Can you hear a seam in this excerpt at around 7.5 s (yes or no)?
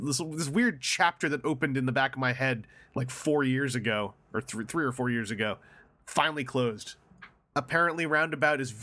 yes